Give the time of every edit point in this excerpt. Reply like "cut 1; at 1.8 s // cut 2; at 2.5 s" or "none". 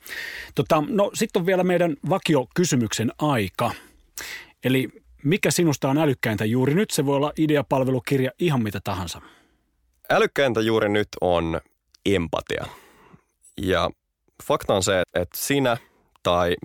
cut 1; at 15.0 s